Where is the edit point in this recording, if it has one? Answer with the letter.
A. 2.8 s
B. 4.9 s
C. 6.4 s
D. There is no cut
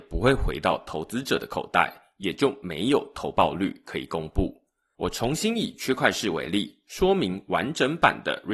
B